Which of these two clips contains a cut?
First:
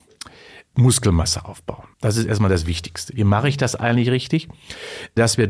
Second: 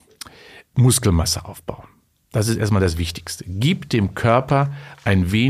first; 2 cuts; at 1.9 s, 3.1 s

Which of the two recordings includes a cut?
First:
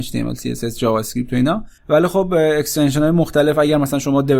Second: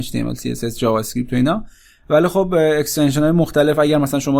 first; 1 cut; at 1.8 s

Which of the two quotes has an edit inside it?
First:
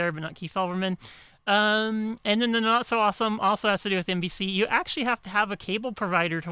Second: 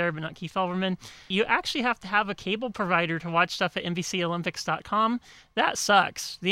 second; 1 cut; at 1.3 s

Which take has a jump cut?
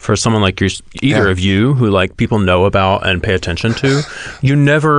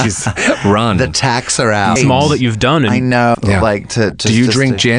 second; 2 cuts; at 2.0 s, 3.3 s

